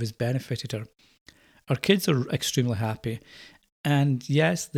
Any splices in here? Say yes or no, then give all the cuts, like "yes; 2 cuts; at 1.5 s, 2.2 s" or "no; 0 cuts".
no; 0 cuts